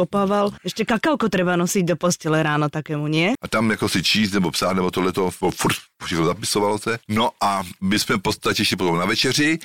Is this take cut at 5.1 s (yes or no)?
no